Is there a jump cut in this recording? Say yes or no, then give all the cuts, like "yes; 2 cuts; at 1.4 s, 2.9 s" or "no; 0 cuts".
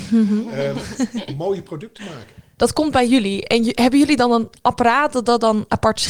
yes; 1 cut; at 2.6 s